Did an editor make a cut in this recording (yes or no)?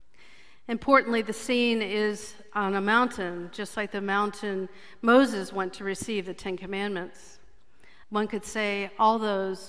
yes